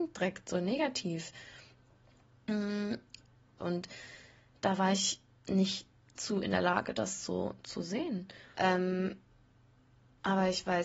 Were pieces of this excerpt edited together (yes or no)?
yes